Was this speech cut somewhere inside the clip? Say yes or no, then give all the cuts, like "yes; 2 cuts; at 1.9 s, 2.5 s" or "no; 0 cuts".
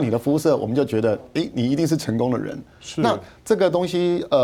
no; 0 cuts